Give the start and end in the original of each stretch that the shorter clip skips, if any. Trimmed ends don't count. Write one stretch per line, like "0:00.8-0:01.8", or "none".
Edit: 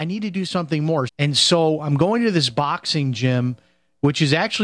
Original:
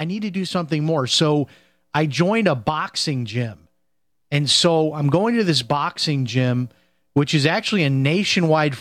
0:01.1-0:04.2